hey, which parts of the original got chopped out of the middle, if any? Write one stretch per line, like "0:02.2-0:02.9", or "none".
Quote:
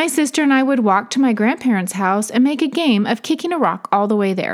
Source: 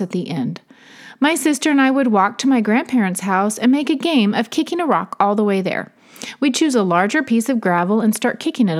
none